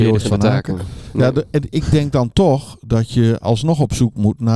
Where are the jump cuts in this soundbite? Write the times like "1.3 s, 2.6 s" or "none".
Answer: none